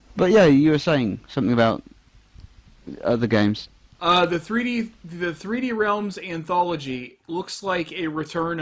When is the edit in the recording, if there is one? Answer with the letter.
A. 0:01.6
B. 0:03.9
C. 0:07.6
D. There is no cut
B